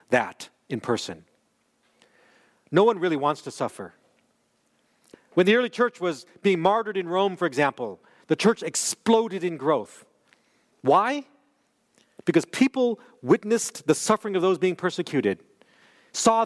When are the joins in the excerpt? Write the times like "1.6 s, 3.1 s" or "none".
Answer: 5.1 s